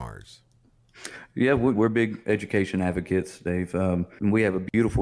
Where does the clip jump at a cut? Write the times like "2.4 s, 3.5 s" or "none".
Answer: 1.7 s